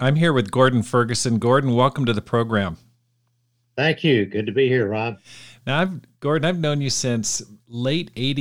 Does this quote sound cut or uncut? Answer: uncut